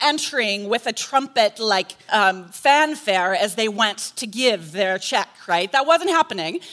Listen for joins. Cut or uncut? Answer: cut